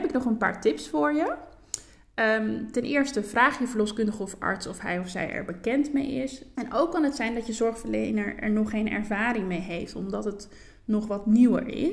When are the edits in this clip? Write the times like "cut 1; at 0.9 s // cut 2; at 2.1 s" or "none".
cut 1; at 6.5 s